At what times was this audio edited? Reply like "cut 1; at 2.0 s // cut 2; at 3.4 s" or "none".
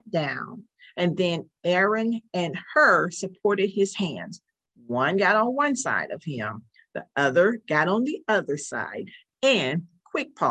none